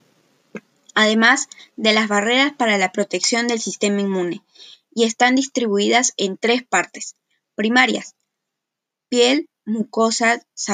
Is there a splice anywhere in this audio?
no; 0 cuts

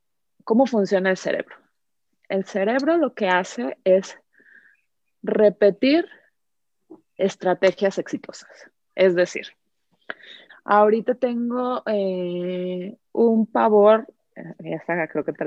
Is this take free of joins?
no; 3 cuts; at 7.2 s, 10.5 s, 13.1 s

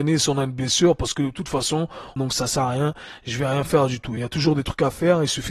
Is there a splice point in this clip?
yes; 2 cuts; at 2.2 s, 4.2 s

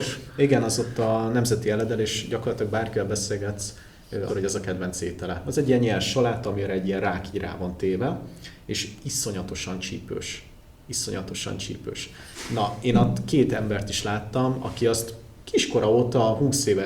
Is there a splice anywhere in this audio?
yes; 1 cut; at 4.3 s

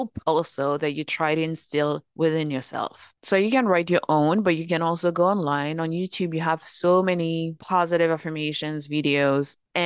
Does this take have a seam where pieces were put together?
no; 0 cuts

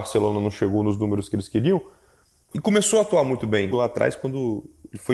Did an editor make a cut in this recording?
yes; 2 cuts; at 2.5 s, 3.7 s

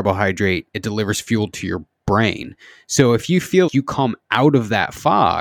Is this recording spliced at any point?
yes; 1 cut; at 3.7 s

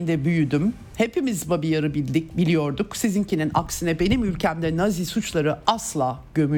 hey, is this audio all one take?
yes; 0 cuts

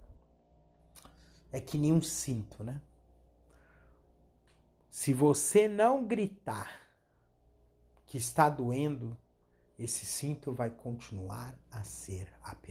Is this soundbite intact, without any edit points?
yes; 0 cuts

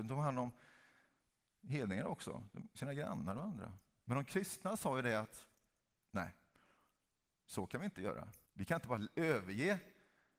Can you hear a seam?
yes; 2 cuts; at 4.0 s, 8.5 s

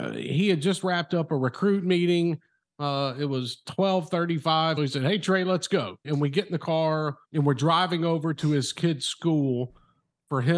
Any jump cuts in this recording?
yes; 3 cuts; at 4.8 s, 6.0 s, 7.2 s

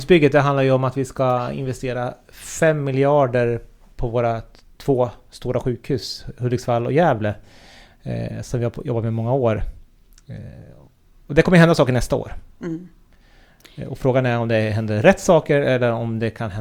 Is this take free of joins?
yes; 0 cuts

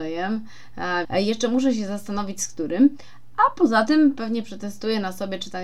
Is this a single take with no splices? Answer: no; 1 cut; at 1.0 s

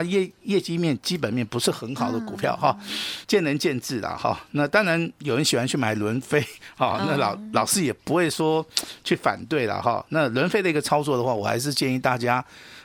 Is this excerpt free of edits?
no; 1 cut; at 3.2 s

